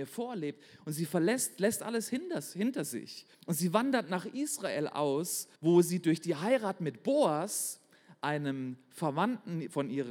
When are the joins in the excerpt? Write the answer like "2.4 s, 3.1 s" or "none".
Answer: 3.3 s, 5.6 s